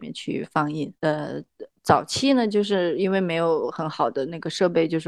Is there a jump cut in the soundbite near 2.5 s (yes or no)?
no